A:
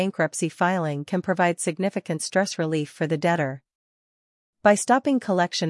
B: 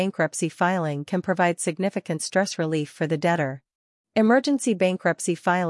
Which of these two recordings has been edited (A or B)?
B